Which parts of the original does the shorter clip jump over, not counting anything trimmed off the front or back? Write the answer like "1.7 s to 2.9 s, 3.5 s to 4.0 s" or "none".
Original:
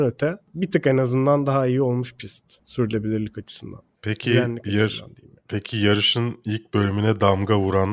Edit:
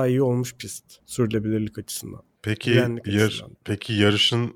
5.1 s to 5.4 s